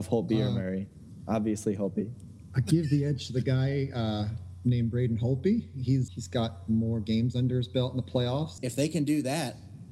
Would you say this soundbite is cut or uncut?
cut